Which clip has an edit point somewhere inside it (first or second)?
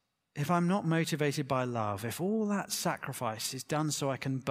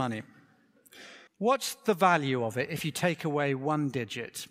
second